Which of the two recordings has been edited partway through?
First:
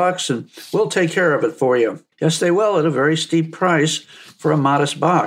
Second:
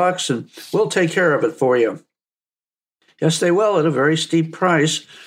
first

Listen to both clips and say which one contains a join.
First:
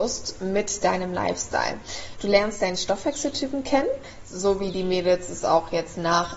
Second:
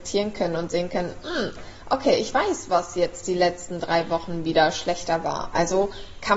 first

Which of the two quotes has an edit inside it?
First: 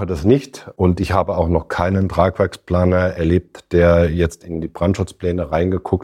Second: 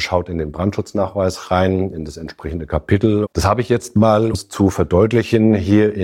second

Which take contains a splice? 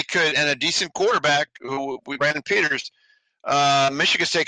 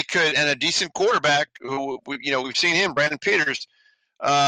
first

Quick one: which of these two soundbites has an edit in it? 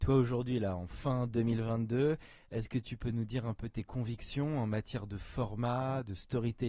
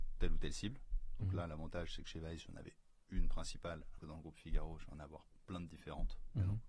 second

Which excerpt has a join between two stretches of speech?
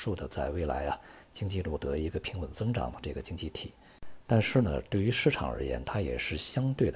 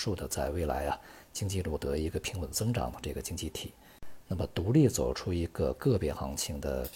second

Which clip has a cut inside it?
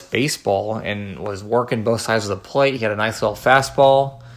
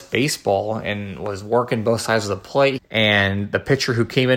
second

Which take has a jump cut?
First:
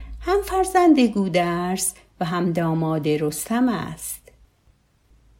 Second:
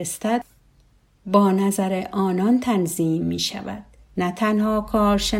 second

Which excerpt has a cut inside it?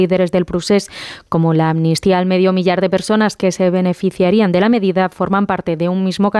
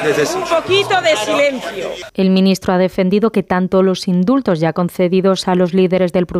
second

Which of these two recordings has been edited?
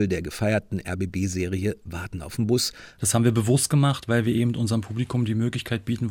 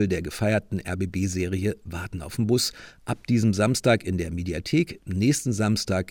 first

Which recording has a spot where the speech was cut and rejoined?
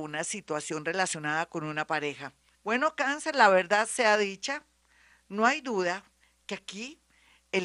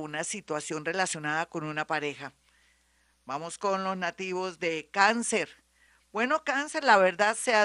first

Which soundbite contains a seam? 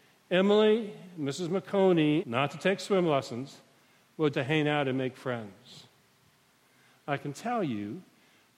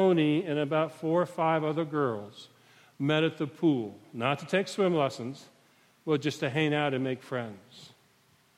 first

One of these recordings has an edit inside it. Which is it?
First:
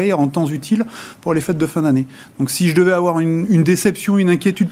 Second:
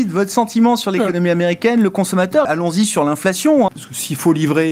second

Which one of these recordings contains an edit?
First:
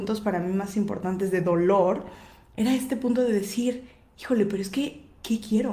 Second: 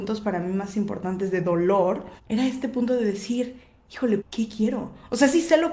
second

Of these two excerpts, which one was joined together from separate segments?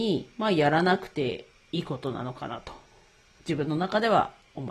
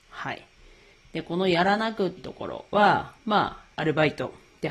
second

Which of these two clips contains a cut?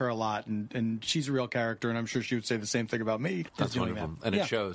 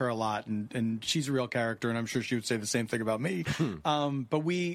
first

